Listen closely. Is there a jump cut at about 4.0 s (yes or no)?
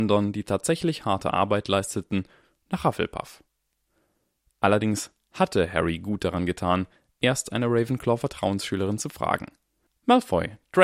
no